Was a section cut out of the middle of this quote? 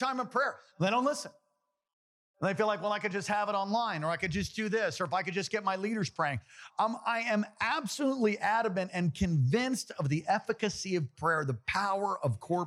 no; 0 cuts

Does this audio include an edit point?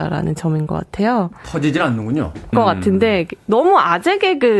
yes; 1 cut; at 2.5 s

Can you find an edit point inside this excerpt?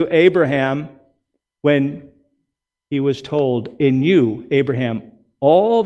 no; 0 cuts

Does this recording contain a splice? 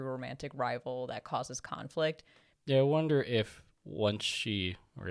yes; 1 cut; at 2.5 s

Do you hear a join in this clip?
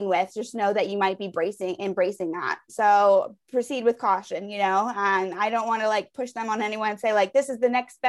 yes; 1 cut; at 2.7 s

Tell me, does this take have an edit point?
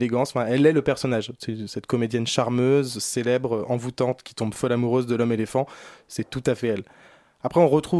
no; 0 cuts

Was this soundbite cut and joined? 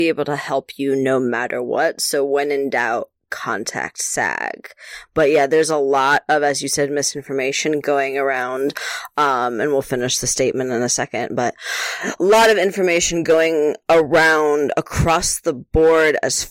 no; 0 cuts

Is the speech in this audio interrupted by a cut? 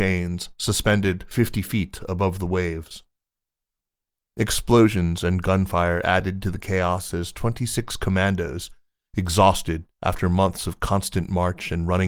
no; 0 cuts

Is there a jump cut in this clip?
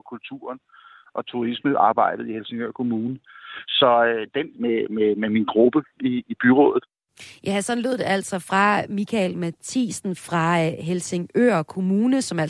yes; 1 cut; at 4.5 s

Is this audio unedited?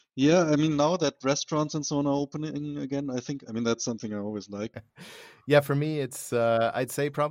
no; 1 cut; at 4.7 s

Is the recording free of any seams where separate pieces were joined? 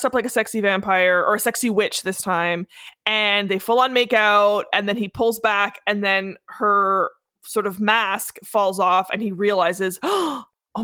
yes; 0 cuts

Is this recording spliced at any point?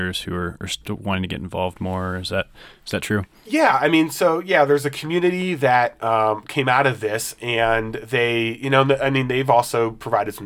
no; 0 cuts

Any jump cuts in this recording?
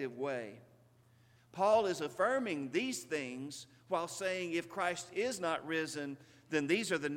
yes; 1 cut; at 1.4 s

